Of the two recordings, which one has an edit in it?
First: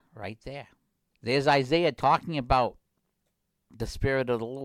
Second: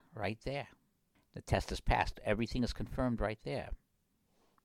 first; 1 cut; at 1.1 s

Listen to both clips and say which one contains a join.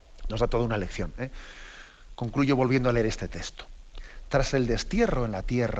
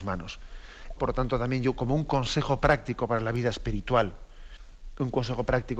second; 1 cut; at 1.0 s

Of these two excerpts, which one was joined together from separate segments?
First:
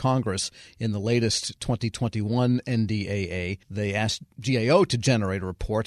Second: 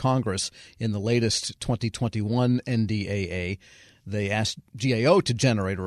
first; 1 cut; at 3.6 s

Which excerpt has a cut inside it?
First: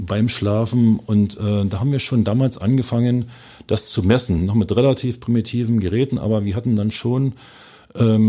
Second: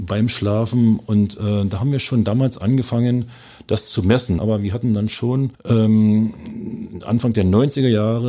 second; 2 cuts; at 4.4 s, 5.5 s

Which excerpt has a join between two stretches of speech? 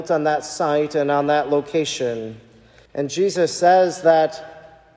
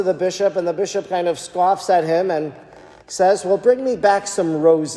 first; 1 cut; at 2.9 s

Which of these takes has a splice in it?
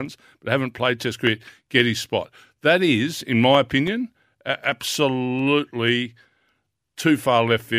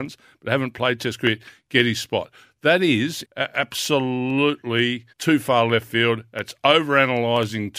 second; 2 cuts; at 3.2 s, 5.1 s

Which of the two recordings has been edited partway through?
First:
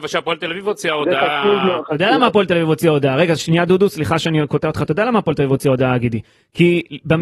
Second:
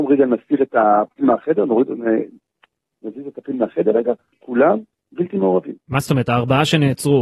second; 1 cut; at 4.3 s

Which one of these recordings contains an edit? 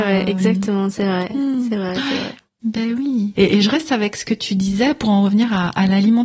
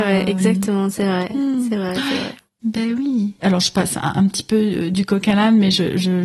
first; 1 cut; at 3.4 s

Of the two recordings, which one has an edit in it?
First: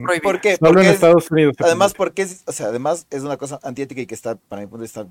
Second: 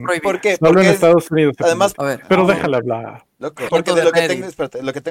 second; 2 cuts; at 1.9 s, 3.7 s

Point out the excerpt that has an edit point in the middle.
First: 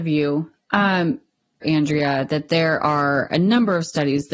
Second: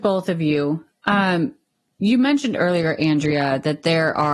first; 1 cut; at 1.6 s

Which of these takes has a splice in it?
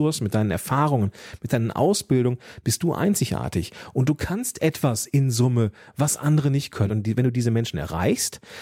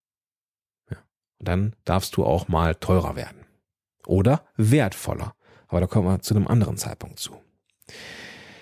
first; 1 cut; at 6.9 s

